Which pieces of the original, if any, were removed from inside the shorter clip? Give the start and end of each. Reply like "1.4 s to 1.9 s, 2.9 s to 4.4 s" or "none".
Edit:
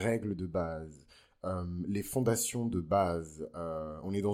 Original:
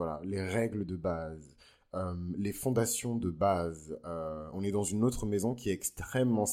none